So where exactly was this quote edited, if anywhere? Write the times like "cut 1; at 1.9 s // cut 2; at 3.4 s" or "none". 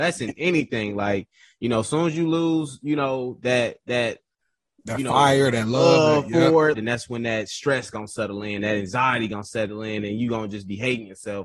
cut 1; at 6.7 s